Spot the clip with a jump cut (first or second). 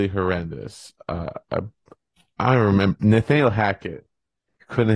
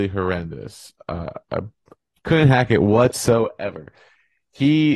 second